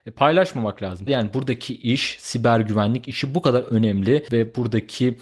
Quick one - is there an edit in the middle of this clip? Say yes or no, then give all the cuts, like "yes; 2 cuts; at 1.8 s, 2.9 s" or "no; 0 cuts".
yes; 1 cut; at 1.1 s